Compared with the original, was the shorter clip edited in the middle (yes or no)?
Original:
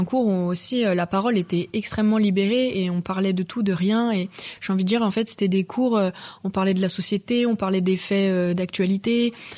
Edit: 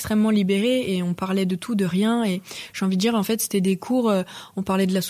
no